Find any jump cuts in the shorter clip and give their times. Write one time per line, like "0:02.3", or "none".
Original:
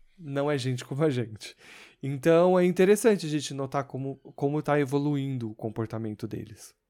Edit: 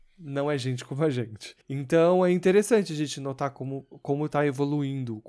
0:01.6